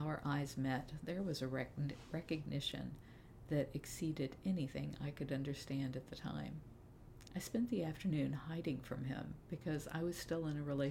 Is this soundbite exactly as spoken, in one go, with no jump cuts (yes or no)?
no